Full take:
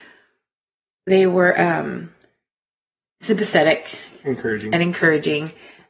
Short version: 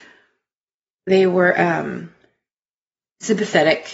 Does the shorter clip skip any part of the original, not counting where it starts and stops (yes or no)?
no